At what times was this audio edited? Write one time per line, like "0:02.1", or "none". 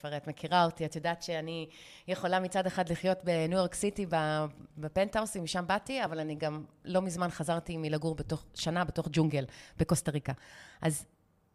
none

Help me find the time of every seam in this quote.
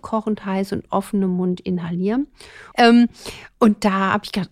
0:02.7

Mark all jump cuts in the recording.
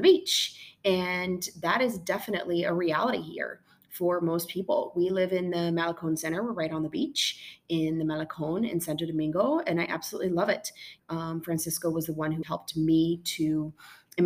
0:11.0
0:12.4

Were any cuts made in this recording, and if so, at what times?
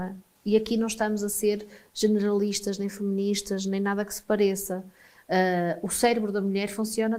none

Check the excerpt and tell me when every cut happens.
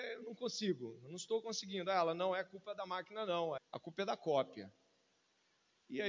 0:03.6

